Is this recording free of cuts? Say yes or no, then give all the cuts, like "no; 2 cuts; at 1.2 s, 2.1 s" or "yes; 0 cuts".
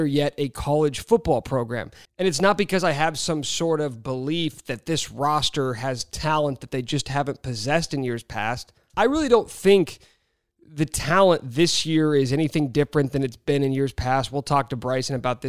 no; 2 cuts; at 2.0 s, 8.9 s